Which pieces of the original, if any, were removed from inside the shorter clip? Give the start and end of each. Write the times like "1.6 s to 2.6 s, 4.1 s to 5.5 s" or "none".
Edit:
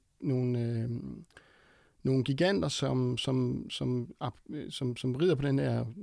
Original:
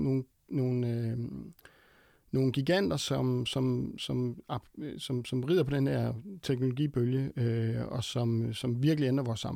none